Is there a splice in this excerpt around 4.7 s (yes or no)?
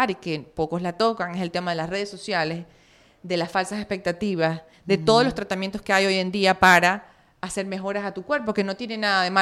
yes